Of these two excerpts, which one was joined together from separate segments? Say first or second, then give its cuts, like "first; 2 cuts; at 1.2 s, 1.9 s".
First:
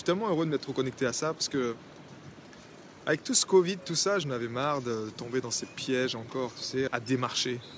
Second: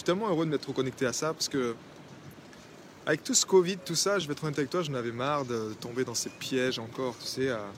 first; 2 cuts; at 4.2 s, 6.9 s